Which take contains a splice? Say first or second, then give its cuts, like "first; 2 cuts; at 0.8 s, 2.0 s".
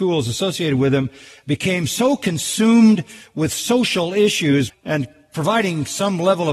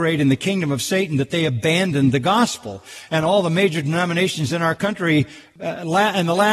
first; 1 cut; at 4.7 s